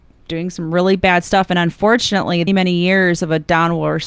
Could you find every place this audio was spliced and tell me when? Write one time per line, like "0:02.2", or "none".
0:02.5